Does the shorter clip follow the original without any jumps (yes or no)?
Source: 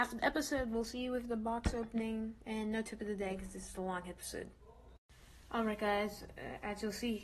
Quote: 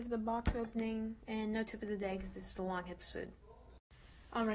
yes